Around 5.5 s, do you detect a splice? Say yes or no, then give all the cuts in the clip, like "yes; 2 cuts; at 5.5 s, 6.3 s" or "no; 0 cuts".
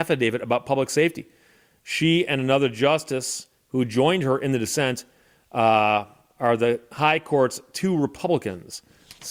no; 0 cuts